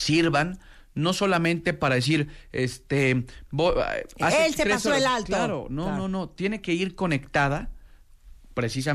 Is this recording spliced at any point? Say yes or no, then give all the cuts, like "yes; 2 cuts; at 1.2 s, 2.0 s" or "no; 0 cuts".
no; 0 cuts